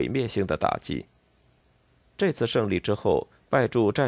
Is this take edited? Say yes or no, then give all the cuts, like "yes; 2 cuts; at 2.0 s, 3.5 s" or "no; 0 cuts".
no; 0 cuts